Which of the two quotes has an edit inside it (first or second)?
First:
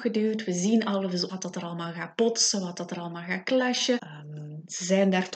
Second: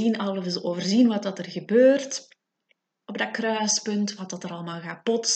first